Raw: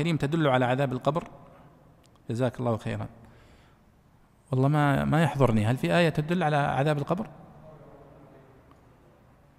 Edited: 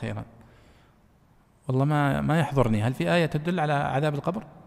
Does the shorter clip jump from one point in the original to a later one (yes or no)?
no